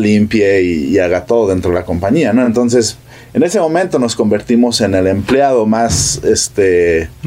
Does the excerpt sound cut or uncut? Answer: uncut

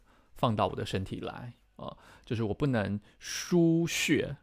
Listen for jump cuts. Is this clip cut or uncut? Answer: uncut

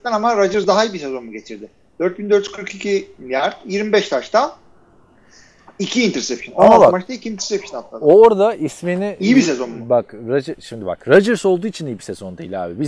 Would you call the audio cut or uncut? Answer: uncut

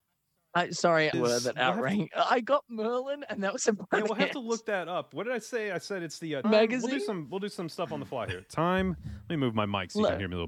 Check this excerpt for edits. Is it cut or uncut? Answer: cut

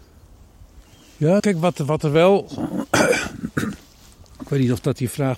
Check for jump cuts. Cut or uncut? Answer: cut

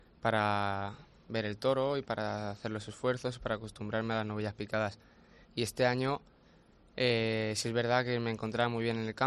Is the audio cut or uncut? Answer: uncut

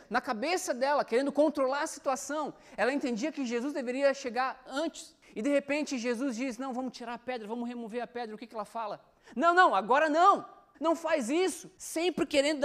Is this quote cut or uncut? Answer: cut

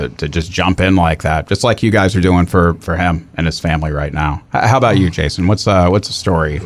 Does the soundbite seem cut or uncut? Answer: uncut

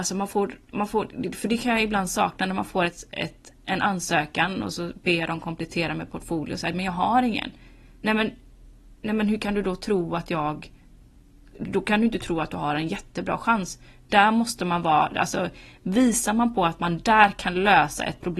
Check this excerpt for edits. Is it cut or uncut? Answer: uncut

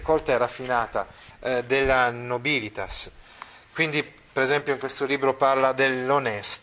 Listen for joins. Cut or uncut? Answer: cut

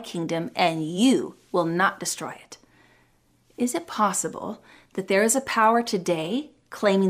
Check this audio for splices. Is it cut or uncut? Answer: uncut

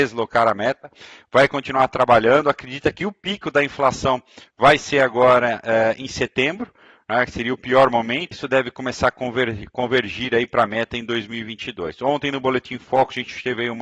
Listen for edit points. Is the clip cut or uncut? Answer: cut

